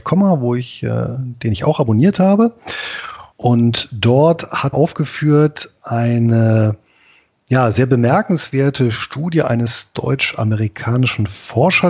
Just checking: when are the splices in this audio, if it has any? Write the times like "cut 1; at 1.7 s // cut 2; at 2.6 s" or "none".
cut 1; at 3.3 s // cut 2; at 4.7 s